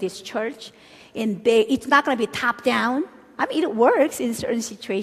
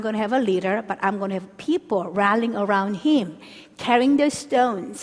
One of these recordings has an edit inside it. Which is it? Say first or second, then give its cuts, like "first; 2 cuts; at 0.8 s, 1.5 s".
first; 1 cut; at 3.4 s